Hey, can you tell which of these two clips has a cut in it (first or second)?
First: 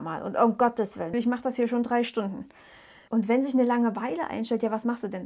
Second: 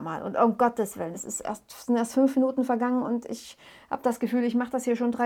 first